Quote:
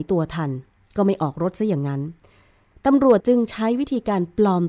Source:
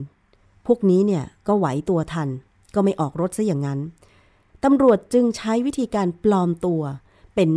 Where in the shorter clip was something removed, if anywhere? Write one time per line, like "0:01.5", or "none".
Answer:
0:03.2

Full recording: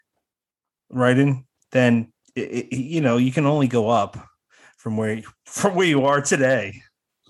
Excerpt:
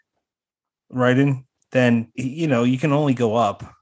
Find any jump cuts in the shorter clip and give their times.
0:02.1

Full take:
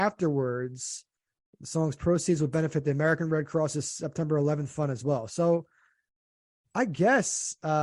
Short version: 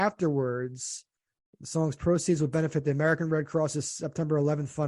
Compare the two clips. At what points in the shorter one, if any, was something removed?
none

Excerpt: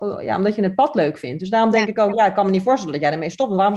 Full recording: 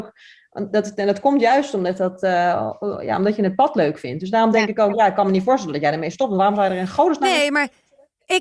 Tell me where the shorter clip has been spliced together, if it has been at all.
none

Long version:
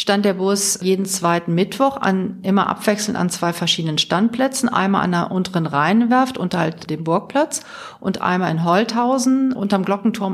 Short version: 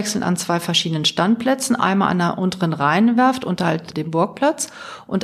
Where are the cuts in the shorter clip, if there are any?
none

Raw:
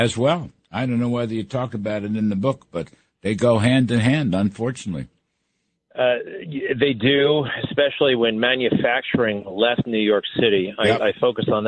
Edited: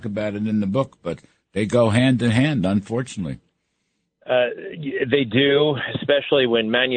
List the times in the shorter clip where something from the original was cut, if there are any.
none

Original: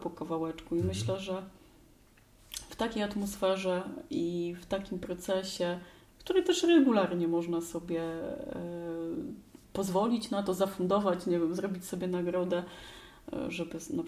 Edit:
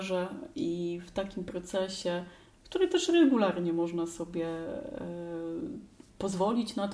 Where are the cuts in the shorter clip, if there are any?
none

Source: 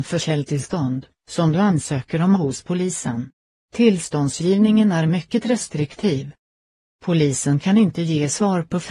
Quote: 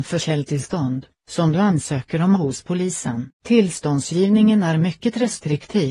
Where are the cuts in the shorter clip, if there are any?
0:03.4

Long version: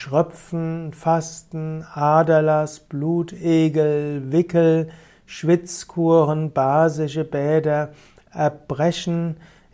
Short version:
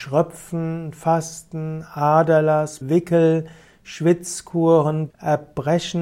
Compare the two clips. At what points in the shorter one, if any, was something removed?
0:02.8
0:05.1

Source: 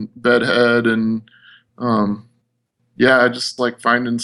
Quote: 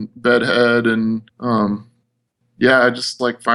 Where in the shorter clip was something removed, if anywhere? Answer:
0:01.3

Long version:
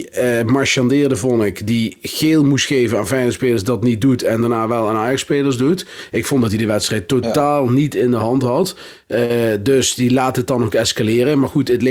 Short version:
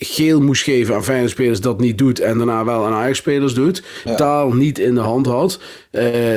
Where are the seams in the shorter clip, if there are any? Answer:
0:04.1

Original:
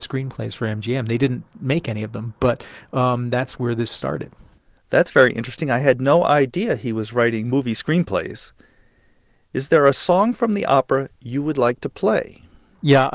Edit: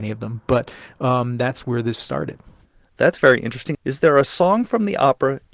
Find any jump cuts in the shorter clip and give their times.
0:03.7

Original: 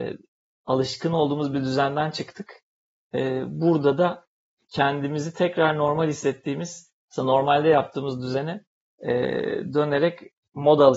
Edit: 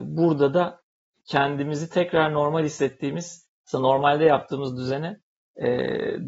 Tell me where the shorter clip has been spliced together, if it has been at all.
none

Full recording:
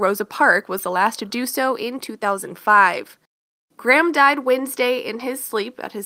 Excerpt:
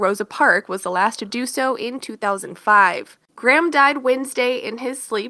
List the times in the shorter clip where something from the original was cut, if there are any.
0:03.2

